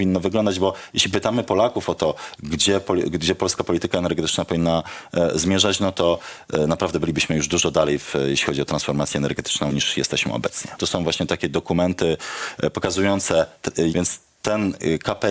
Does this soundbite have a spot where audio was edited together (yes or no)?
yes